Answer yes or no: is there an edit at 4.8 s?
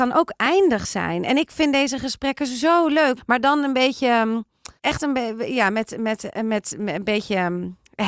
yes